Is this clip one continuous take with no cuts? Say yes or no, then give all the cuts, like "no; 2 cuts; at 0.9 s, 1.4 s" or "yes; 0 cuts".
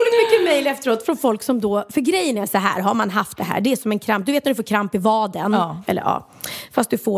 yes; 0 cuts